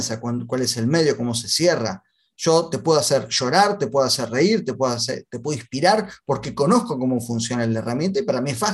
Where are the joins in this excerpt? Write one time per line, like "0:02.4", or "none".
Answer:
none

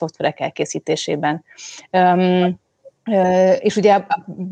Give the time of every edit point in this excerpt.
0:03.0

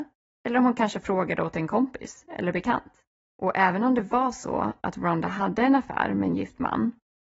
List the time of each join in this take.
0:03.3

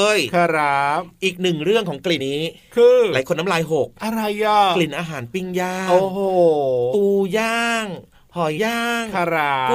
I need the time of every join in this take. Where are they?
0:02.2
0:08.6

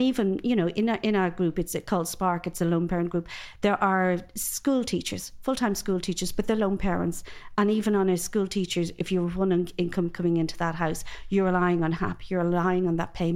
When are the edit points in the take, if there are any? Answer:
none

